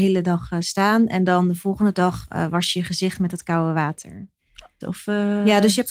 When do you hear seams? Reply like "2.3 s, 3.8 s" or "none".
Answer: 4.8 s